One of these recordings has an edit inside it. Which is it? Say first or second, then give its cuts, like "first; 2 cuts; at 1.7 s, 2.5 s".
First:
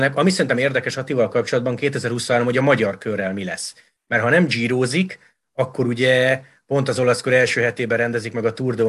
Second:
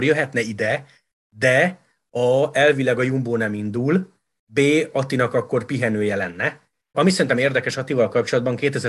second; 1 cut; at 6.9 s